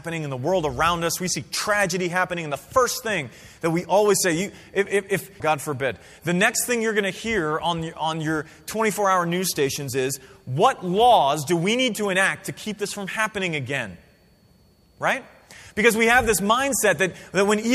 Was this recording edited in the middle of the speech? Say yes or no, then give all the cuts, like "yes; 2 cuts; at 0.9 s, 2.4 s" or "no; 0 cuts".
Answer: yes; 1 cut; at 5.4 s